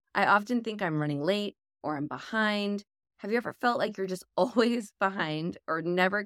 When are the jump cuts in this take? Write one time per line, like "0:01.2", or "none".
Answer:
0:01.8